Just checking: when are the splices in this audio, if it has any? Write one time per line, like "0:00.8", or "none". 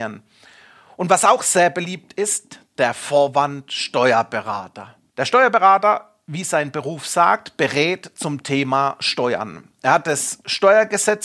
0:05.1